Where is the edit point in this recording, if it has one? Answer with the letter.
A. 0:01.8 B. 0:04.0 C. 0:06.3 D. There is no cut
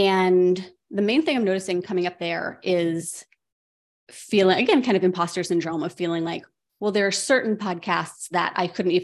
D